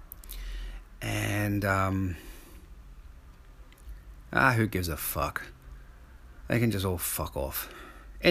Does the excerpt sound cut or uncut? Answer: uncut